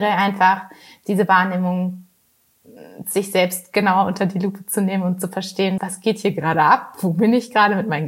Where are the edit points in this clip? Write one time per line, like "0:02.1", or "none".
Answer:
0:05.8